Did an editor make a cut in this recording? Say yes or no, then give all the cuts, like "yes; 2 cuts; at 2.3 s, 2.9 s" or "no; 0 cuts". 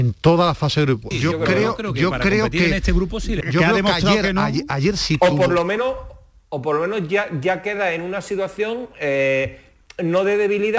yes; 2 cuts; at 1.1 s, 3.4 s